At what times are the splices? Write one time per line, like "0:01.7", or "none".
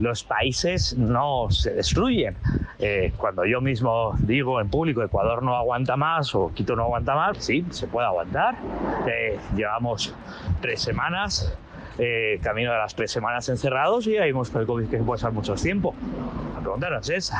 0:07.3